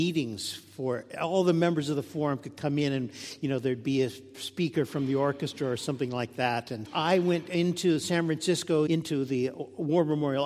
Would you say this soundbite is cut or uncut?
cut